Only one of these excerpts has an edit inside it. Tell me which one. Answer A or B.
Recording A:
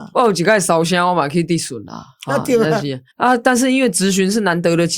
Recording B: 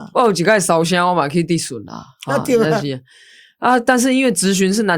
A